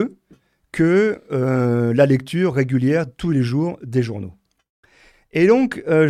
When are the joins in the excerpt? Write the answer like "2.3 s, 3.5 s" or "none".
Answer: none